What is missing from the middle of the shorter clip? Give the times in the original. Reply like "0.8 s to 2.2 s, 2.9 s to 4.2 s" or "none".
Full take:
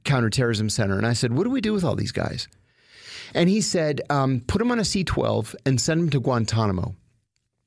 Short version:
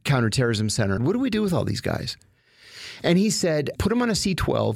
1.0 s to 1.3 s, 4.1 s to 4.4 s